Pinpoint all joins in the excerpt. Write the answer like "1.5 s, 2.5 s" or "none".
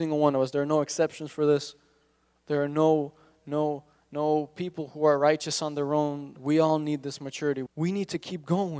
6.3 s, 7.7 s